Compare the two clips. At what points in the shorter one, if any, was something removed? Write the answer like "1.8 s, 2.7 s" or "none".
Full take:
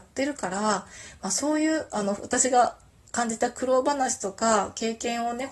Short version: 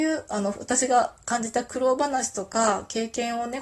1.2 s

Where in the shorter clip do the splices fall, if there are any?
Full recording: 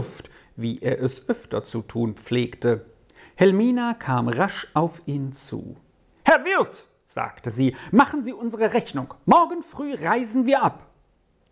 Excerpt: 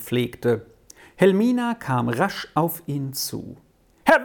none

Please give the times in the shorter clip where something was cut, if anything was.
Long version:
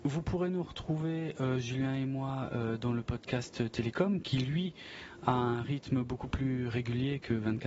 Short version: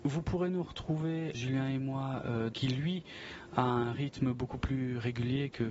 1.3 s, 2.5 s

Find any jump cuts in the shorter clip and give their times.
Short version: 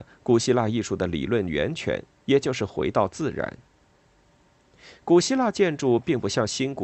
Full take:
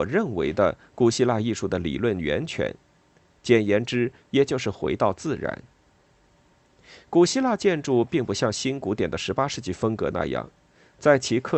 2.2 s

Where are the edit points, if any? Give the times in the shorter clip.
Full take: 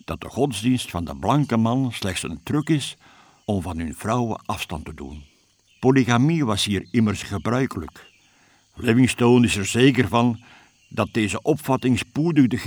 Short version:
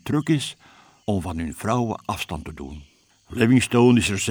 3.1 s

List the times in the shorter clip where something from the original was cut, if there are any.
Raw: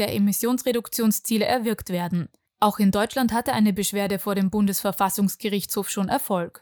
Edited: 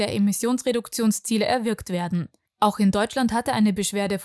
none

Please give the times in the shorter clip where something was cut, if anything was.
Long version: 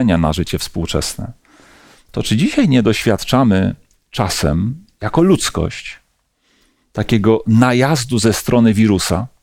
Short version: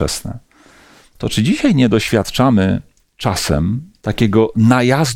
4.0 s

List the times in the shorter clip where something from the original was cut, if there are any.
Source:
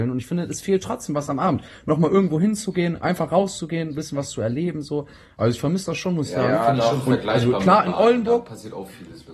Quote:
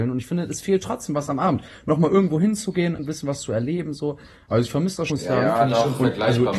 3.0 s, 5.1 s

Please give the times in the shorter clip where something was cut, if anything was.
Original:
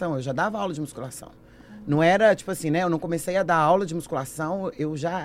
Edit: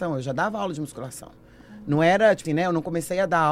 2.4 s

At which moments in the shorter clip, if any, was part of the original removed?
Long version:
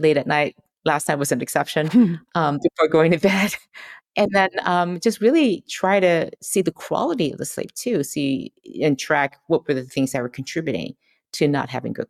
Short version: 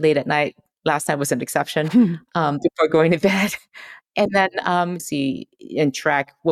5.0 s

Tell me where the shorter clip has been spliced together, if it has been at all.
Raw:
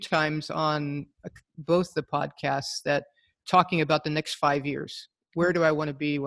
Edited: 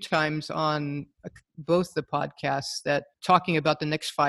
3.1 s

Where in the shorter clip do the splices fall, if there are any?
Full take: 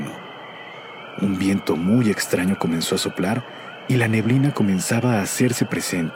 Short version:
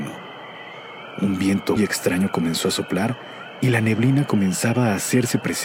1.8 s

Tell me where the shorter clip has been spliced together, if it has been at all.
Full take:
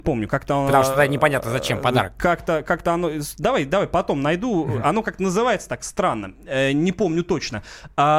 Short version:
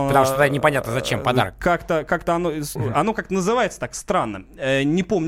2.8 s

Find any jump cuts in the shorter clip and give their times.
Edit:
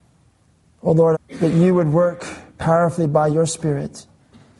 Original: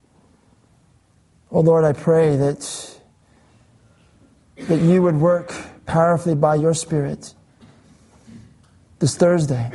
1.1 s

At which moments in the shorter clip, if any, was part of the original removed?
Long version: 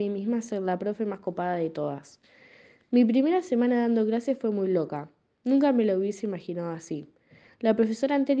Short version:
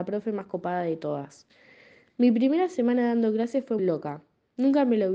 3.8 s

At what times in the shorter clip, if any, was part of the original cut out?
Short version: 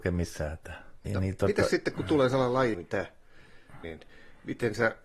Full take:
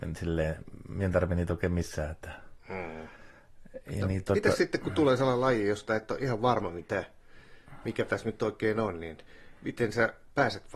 1.1 s, 2.7 s, 3.8 s

